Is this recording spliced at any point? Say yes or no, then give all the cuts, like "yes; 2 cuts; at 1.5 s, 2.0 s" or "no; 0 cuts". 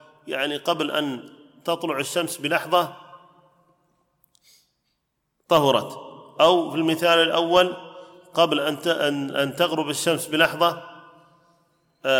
no; 0 cuts